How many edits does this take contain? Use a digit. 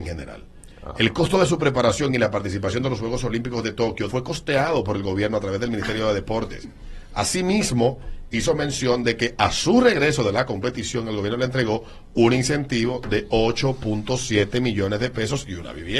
1